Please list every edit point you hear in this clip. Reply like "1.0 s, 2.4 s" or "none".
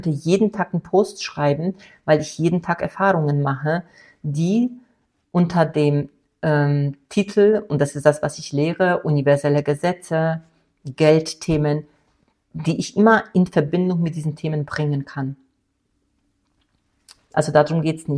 17.2 s

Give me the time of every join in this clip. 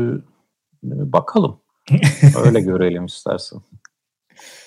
1.7 s

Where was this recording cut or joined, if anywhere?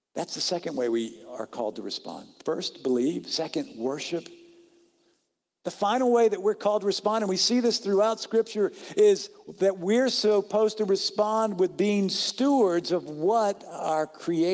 none

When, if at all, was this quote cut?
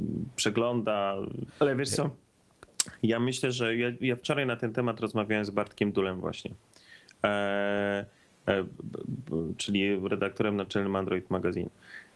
1.5 s

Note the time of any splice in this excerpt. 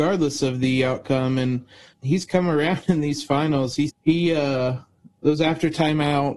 1.9 s, 3.9 s

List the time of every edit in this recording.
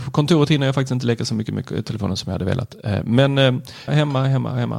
3.9 s

